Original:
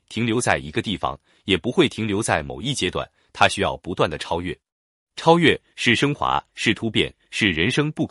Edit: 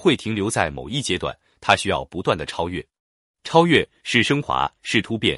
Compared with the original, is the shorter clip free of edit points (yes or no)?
yes